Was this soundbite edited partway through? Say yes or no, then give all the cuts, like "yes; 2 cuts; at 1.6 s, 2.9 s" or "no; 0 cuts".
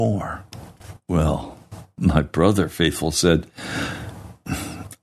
no; 0 cuts